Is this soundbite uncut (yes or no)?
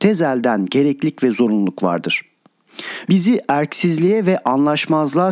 no